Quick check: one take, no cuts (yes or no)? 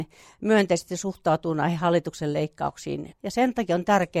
no